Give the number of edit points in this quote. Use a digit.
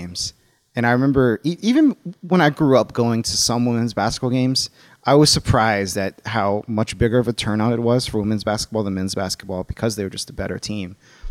0